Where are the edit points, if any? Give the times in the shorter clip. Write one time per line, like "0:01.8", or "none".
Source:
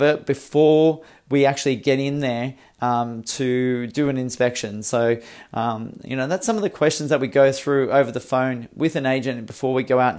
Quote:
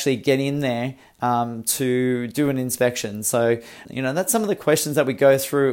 0:03.8